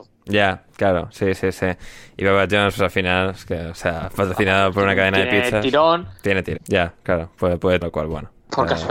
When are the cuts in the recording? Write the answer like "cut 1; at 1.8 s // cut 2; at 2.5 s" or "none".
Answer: cut 1; at 6.6 s // cut 2; at 7.8 s